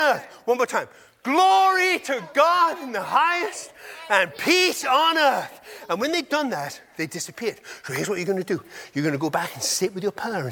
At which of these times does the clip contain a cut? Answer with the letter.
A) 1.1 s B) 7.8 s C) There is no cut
C